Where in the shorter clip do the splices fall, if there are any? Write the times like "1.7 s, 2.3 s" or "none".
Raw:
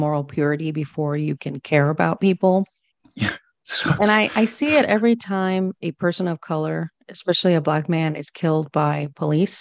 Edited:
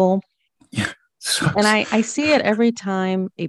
none